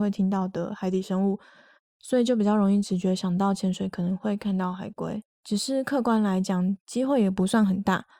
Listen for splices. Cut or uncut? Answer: cut